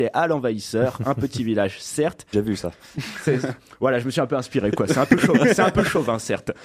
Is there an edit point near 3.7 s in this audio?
no; 1 cut; at 2.3 s

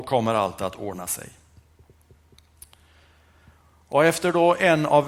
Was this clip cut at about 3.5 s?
no; 0 cuts

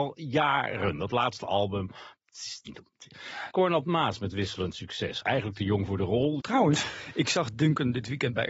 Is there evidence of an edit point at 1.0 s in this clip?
no; 3 cuts; at 3.5 s, 5.2 s, 6.4 s

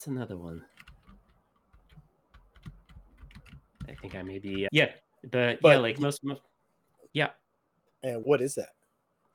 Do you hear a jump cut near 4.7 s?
yes; 3 cuts; at 4.7 s, 7.1 s, 8.2 s

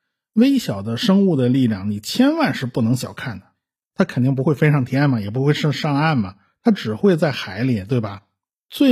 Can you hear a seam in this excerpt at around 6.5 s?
no; 1 cut; at 3.8 s

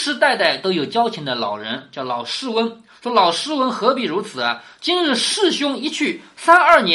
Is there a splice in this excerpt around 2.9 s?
no; 0 cuts

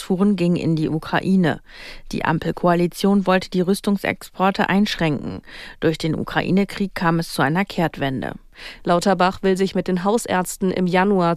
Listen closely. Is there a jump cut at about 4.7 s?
yes; 2 cuts; at 4.7 s, 8.8 s

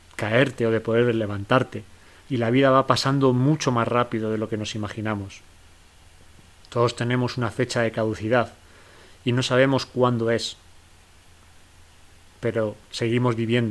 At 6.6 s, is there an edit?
no; 1 cut; at 2.2 s

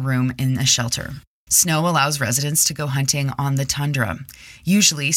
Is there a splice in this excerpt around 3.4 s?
no; 1 cut; at 1.5 s

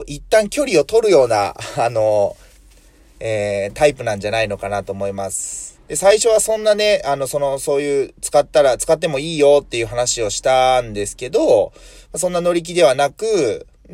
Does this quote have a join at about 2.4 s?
no; 1 cut; at 5.7 s

